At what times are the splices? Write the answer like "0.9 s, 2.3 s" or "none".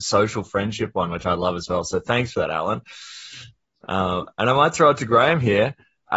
none